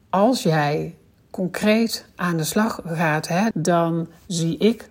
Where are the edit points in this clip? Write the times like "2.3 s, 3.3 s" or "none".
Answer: 3.5 s